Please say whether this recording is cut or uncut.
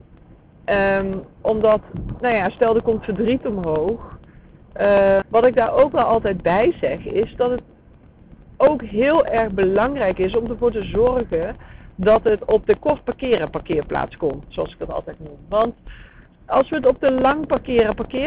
cut